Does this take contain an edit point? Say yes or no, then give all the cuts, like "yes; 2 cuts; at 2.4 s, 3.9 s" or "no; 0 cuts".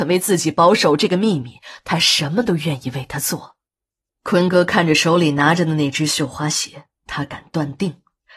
yes; 2 cuts; at 4.1 s, 7.0 s